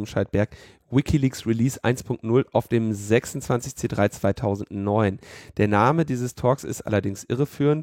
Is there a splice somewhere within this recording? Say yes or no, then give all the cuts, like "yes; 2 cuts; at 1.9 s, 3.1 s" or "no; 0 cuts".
no; 0 cuts